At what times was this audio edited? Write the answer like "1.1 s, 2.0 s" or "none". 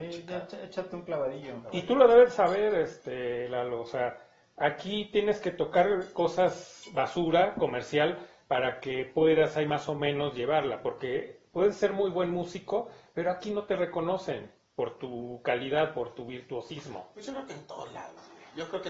none

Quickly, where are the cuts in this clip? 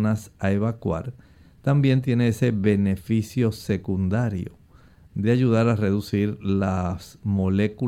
none

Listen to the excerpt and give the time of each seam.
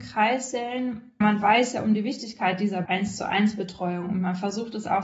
none

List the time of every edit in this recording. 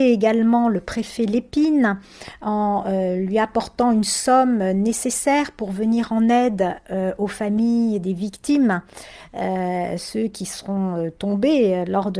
8.0 s

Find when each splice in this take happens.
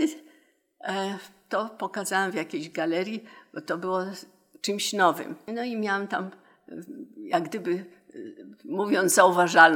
5.5 s

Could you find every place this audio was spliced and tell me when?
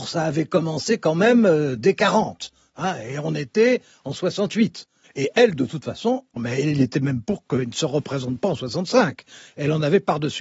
5.0 s, 6.4 s

